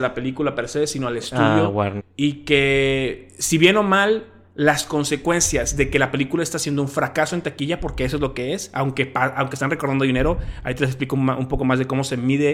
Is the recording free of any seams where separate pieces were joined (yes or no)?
no